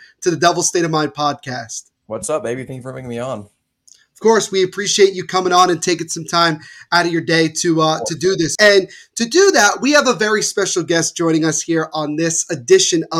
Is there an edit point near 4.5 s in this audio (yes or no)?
no